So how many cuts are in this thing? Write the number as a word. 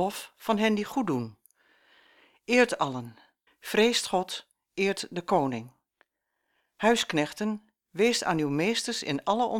one